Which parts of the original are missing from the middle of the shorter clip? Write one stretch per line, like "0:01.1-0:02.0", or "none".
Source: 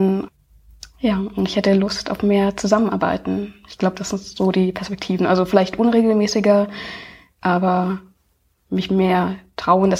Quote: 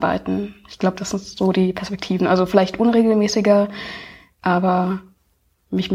none

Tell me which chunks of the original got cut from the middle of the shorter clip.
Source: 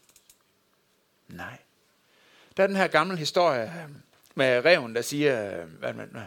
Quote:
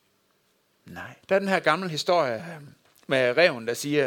0:01.7-0:02.5

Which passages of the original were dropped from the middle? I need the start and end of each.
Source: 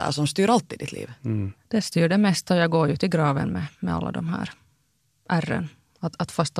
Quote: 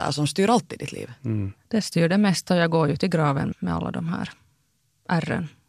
0:03.5-0:03.7

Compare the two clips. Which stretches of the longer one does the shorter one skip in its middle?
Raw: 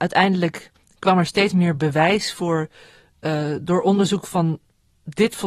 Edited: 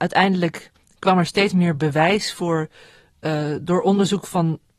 none

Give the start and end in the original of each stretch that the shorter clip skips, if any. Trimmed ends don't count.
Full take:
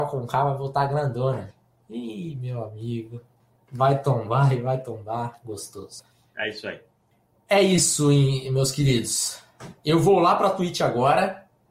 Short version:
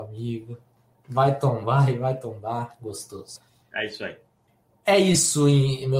none

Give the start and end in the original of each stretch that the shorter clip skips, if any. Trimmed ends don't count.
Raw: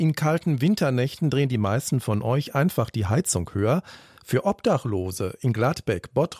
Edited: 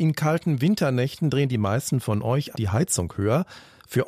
0:02.5-0:02.9

